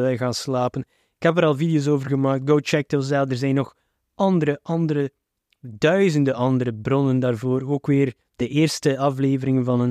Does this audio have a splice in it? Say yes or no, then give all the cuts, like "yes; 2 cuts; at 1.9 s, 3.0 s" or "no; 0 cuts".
no; 0 cuts